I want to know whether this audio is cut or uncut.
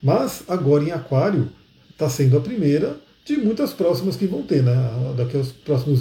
cut